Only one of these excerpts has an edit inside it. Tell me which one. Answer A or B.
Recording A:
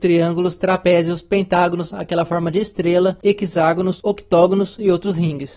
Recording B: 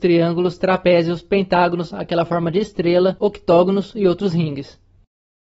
B